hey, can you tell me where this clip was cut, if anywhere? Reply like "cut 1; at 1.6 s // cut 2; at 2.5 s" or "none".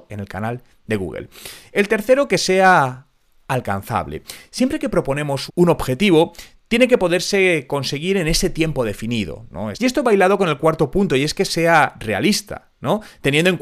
cut 1; at 5.5 s // cut 2; at 9.7 s